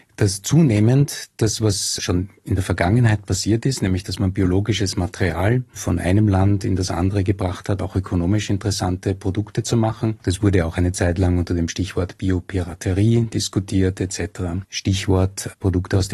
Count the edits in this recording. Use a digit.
3